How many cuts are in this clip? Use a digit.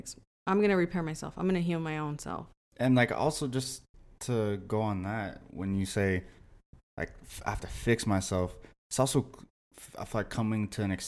1